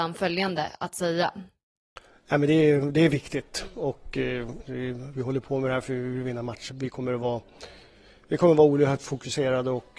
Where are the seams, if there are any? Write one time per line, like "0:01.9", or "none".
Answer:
0:04.6
0:06.7

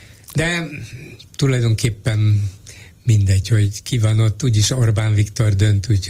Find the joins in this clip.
none

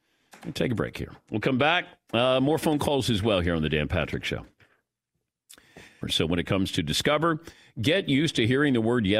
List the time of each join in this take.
0:06.0

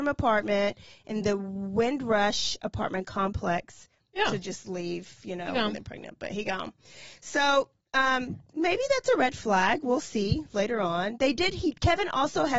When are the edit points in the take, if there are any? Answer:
0:04.0
0:11.2

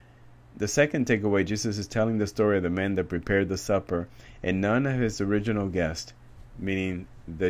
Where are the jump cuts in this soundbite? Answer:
none

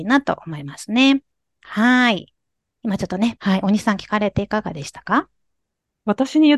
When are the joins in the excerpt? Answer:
0:03.4

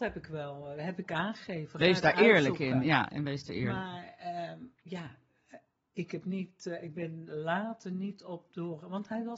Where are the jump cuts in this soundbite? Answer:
none

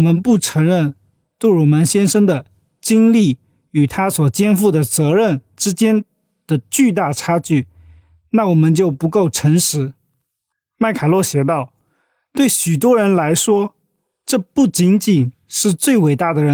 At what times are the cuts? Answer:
none

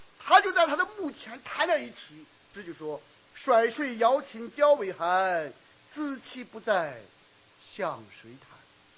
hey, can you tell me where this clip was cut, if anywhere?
0:02.5

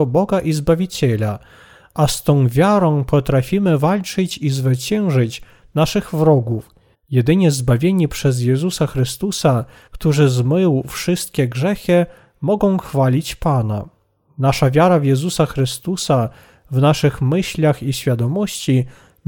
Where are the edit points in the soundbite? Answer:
0:06.9
0:09.9

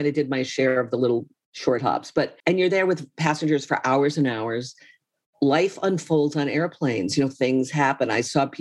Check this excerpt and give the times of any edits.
0:02.4

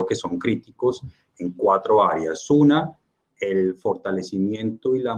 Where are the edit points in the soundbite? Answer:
none

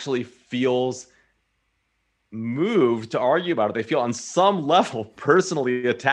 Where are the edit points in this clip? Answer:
none

